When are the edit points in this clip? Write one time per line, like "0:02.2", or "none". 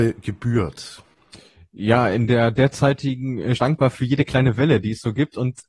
0:03.6